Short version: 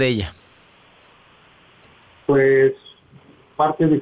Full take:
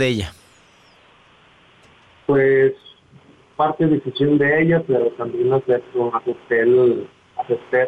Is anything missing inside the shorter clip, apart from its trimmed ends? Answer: no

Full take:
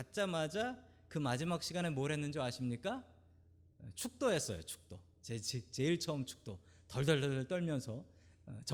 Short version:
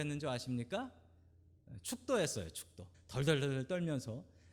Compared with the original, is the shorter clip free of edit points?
no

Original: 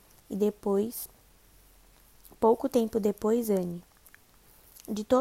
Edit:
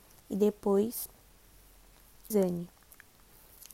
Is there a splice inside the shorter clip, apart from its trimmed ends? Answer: yes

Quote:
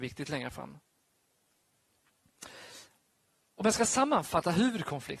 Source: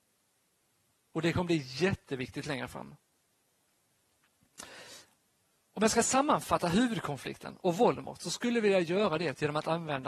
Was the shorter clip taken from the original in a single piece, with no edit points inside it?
yes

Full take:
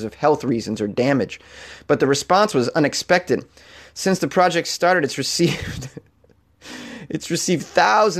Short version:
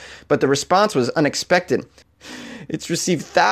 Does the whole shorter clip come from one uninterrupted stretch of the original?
no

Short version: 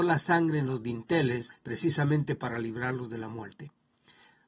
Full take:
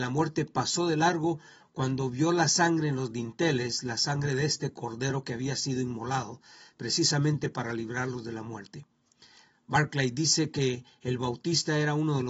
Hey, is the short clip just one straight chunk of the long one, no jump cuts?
no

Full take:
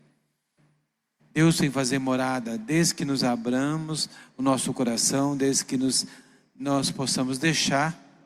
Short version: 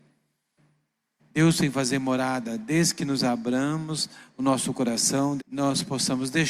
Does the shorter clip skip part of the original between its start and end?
yes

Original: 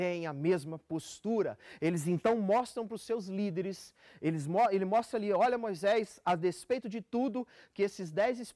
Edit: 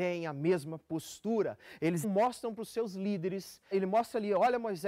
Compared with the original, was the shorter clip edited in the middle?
yes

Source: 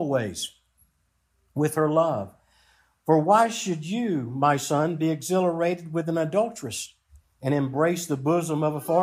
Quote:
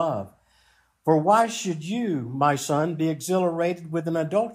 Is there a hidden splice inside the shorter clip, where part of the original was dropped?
no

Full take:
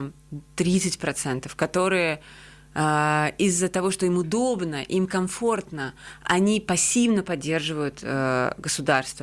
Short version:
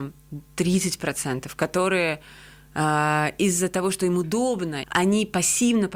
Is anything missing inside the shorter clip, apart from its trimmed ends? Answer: yes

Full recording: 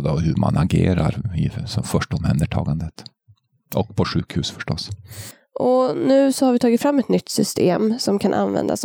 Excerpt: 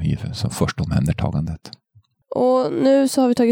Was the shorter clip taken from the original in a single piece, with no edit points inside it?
no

